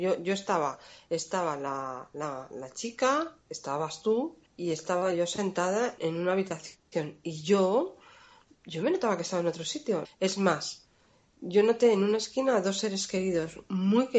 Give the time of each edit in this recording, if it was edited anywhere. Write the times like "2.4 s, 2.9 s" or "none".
4.5 s, 6.0 s, 10.0 s